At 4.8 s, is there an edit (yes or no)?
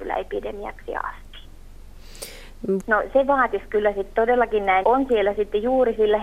yes